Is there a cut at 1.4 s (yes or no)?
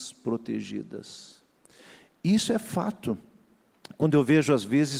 no